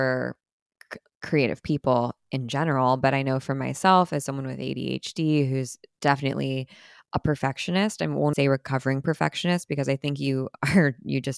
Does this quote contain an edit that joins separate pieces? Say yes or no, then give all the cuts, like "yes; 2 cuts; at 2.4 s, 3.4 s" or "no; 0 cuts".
yes; 1 cut; at 8.3 s